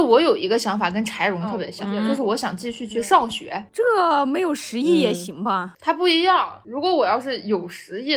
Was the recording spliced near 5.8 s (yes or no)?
no